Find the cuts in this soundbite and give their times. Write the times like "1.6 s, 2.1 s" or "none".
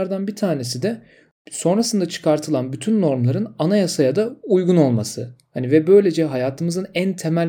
none